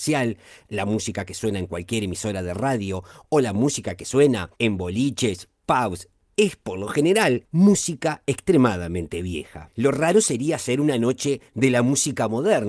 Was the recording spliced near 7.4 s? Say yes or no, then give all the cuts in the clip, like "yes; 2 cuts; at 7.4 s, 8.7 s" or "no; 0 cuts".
yes; 2 cuts; at 6.3 s, 7.4 s